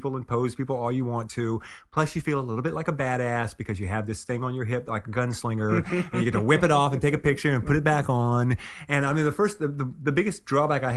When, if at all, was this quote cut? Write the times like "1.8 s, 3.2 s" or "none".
none